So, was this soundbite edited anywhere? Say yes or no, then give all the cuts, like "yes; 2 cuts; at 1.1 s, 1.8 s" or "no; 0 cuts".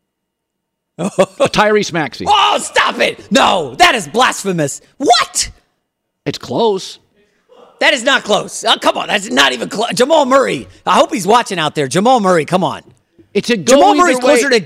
no; 0 cuts